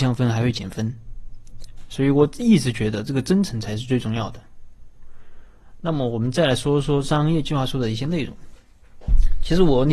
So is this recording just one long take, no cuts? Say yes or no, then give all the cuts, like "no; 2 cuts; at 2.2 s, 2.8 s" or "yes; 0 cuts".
yes; 0 cuts